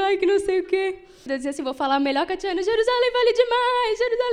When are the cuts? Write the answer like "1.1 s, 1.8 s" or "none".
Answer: 1.3 s